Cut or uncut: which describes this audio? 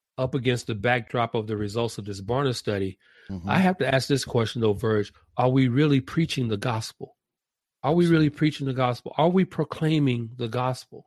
uncut